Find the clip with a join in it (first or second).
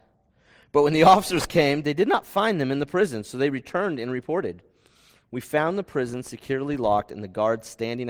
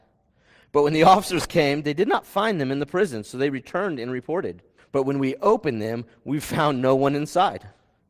second